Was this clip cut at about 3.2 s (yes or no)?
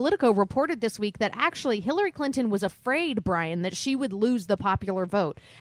no